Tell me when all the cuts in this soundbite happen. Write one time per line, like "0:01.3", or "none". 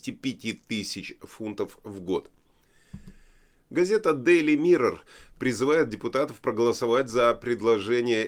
none